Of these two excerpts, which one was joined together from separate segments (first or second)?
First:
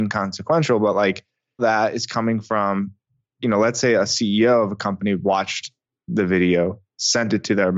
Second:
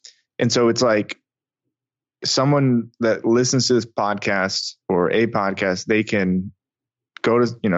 first